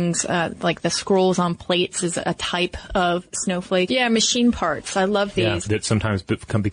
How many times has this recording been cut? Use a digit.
2